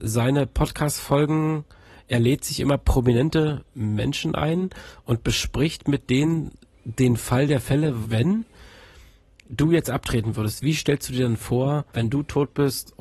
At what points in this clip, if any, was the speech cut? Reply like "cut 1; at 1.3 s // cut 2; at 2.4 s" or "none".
cut 1; at 8.0 s // cut 2; at 11.9 s